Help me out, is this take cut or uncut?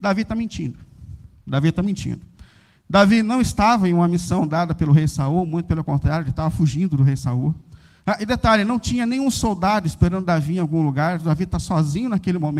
uncut